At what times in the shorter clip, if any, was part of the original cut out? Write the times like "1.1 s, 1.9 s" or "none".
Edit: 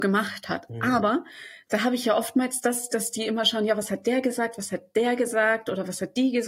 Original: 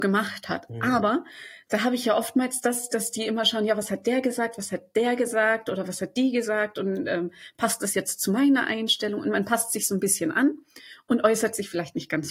none